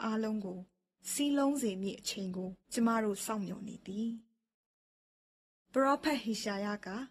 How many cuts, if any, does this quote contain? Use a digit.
1